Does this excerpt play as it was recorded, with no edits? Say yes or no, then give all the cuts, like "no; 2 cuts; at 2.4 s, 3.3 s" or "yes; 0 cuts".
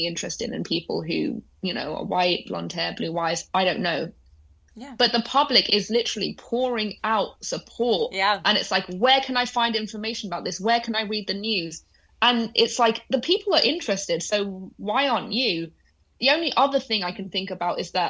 no; 1 cut; at 4.7 s